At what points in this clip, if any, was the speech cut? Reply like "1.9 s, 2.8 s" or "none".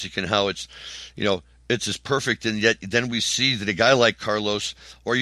none